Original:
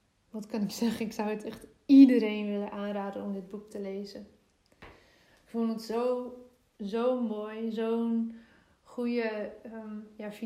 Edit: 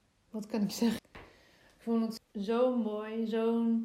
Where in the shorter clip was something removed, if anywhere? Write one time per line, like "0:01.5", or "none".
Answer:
0:01.0
0:02.2